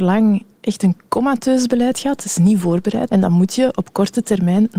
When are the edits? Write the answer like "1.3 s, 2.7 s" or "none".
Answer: 3.1 s